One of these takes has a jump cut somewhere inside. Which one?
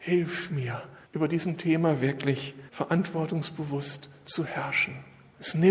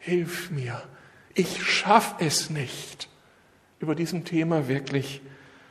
first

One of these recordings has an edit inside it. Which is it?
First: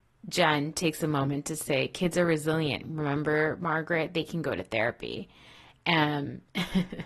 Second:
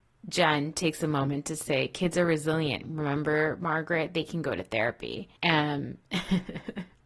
second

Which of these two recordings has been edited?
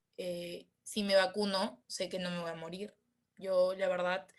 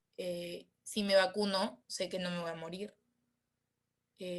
first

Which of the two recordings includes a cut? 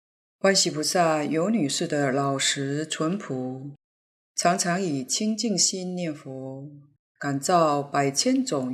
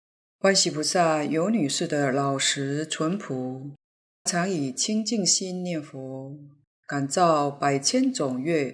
second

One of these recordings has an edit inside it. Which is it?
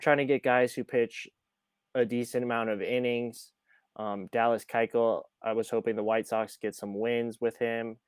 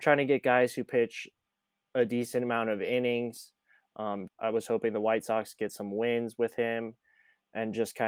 second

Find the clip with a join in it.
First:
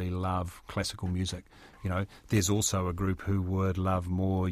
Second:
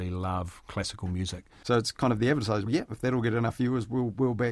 second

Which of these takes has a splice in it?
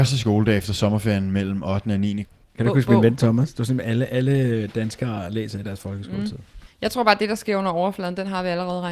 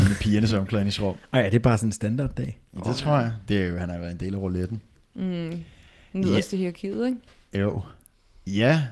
first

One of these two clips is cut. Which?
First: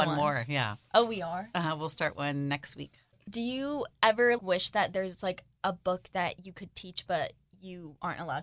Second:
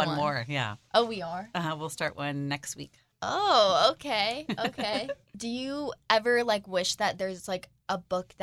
first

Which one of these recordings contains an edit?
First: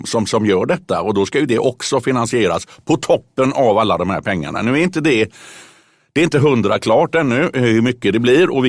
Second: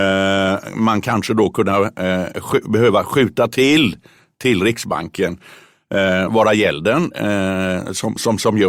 second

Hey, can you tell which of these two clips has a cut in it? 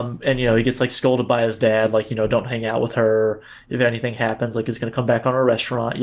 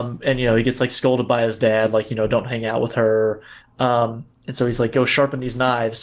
second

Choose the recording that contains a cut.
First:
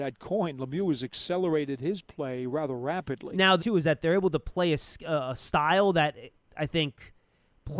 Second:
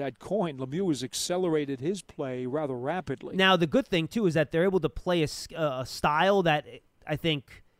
first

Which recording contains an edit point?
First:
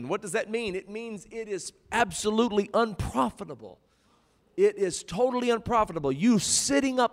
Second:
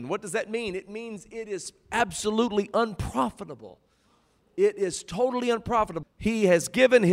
second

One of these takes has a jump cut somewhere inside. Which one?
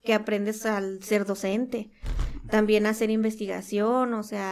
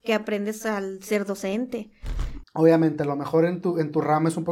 second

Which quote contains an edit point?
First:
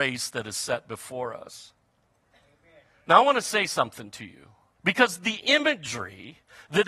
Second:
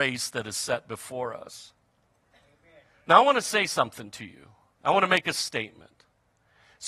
first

